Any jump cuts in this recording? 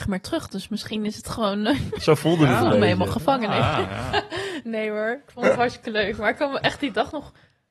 no; 0 cuts

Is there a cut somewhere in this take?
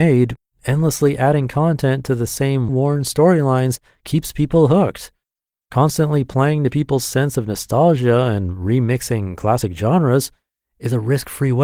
yes; 1 cut; at 2.7 s

